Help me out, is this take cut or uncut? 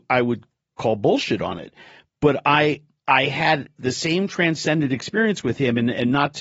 uncut